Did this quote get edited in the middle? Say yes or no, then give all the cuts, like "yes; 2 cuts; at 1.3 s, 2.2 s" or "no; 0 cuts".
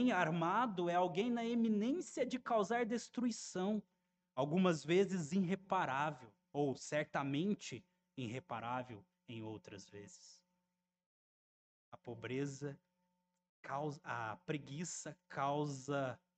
no; 0 cuts